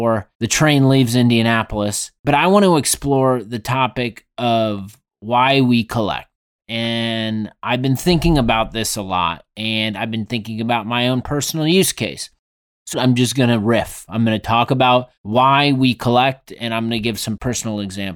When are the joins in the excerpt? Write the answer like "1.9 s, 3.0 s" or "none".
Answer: 12.9 s, 15.2 s